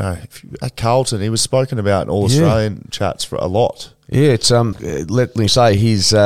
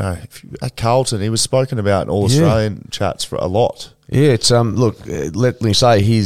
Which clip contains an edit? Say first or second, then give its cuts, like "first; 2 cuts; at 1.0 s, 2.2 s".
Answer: first; 1 cut; at 4.7 s